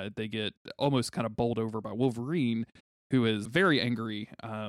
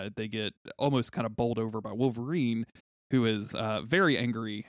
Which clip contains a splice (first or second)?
first